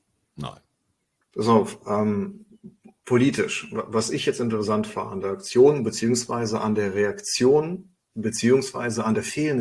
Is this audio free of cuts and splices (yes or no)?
no